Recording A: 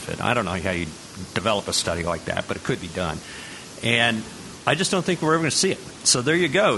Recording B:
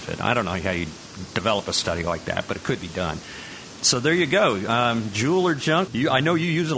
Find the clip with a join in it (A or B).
B